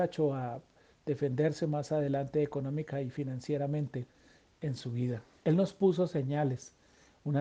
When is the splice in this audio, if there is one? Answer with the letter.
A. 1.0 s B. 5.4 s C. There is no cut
B